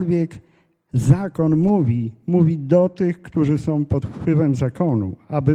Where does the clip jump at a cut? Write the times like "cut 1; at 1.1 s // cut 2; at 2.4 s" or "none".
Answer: none